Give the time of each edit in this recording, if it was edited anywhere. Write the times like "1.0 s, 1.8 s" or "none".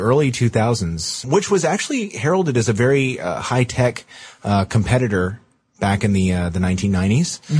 1.2 s